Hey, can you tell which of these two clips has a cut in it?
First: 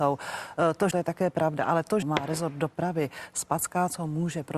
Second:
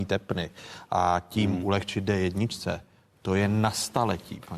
first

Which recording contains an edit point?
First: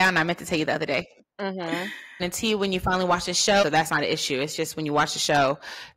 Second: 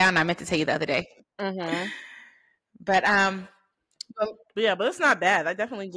first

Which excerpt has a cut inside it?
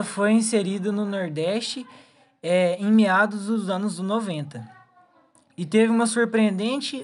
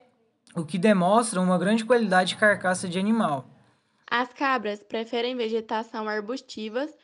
second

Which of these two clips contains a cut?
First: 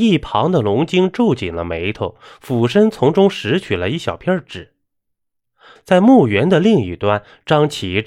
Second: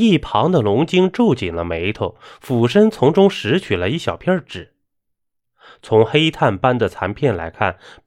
first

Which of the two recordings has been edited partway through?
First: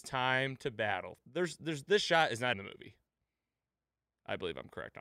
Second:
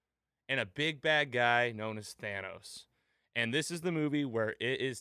first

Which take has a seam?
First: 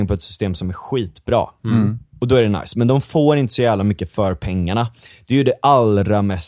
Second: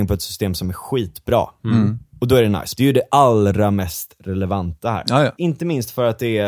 second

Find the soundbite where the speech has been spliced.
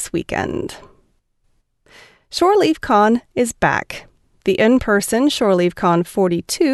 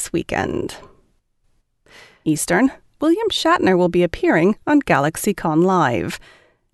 second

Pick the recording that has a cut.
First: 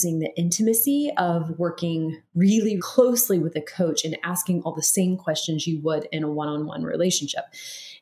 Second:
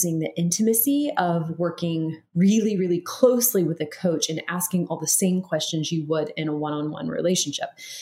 first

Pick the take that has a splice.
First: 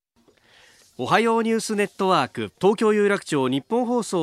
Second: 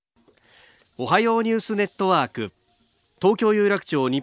first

